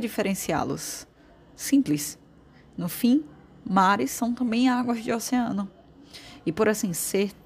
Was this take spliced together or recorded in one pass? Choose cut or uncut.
uncut